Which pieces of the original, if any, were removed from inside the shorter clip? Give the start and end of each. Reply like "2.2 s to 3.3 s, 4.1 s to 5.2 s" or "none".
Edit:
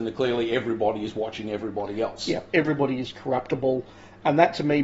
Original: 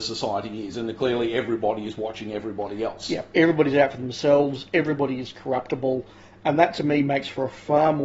3.3 s to 4.7 s